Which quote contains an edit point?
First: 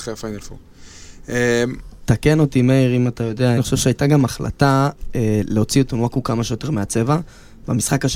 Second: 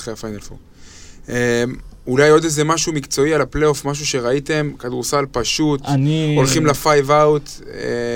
first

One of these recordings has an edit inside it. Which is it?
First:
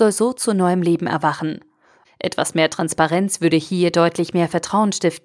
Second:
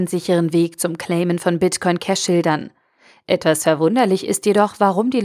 first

